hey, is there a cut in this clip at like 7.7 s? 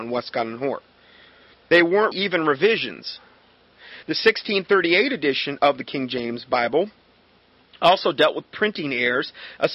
no; 2 cuts; at 2.1 s, 4.0 s

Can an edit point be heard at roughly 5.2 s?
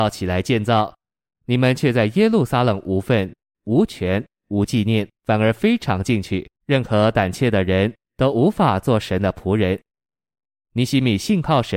yes; 2 cuts; at 5.2 s, 6.6 s

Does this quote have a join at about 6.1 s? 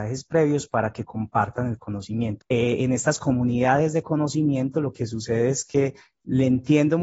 no; 1 cut; at 2.4 s

